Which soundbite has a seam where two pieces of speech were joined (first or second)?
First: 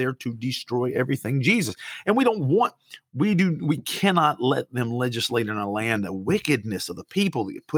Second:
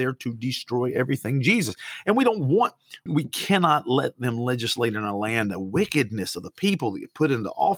second